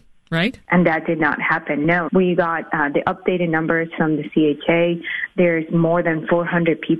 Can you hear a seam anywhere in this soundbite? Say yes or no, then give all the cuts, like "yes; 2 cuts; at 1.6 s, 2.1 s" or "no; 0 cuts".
no; 0 cuts